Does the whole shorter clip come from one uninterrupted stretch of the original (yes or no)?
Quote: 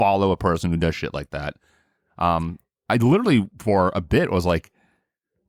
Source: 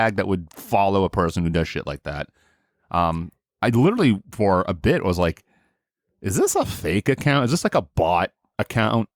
yes